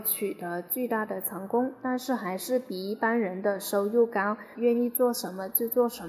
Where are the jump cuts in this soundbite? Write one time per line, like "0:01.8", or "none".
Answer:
0:04.5